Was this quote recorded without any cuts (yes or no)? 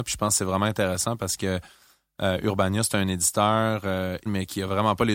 no